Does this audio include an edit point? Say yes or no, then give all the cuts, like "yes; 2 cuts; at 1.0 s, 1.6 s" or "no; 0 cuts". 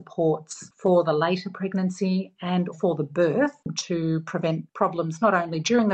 yes; 1 cut; at 2.7 s